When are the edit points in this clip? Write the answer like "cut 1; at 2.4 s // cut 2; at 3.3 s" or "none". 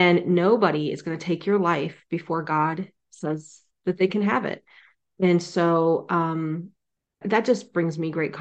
cut 1; at 7.2 s